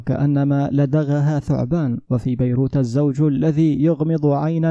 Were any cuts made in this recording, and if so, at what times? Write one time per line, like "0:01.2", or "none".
0:02.0